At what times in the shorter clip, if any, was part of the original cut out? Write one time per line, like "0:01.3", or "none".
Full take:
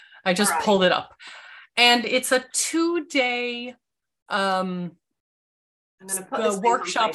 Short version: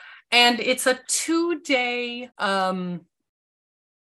0:02.3